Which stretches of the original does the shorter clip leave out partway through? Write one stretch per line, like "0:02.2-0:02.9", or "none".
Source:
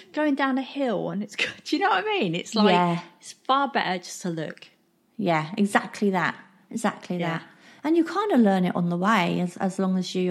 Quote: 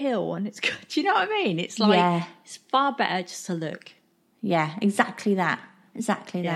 none